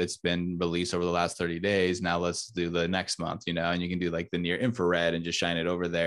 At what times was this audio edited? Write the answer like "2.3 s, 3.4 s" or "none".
none